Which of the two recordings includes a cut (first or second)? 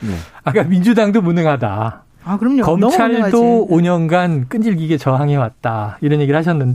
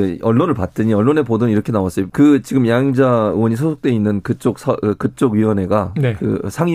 second